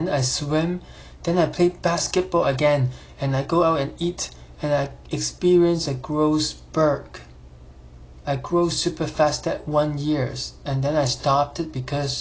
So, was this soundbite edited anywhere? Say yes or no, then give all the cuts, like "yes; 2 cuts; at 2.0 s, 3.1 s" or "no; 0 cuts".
no; 0 cuts